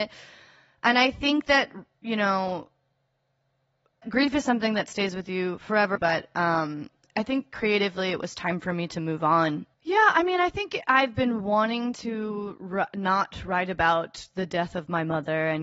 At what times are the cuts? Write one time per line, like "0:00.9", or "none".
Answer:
0:06.0
0:09.7